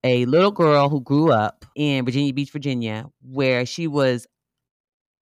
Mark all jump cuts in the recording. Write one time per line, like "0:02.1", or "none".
0:01.7